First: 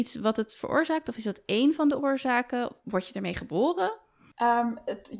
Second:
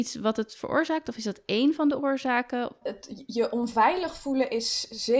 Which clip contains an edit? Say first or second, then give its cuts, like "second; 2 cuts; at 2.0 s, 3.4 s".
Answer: second; 1 cut; at 2.8 s